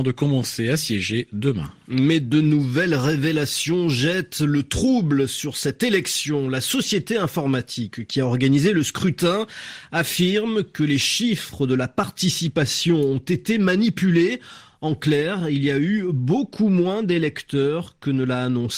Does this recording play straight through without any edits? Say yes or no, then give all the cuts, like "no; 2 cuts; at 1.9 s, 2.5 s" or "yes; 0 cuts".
yes; 0 cuts